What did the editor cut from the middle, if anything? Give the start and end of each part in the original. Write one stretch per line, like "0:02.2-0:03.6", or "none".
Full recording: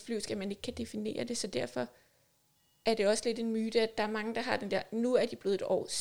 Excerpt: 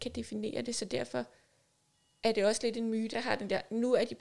0:03.7-0:04.3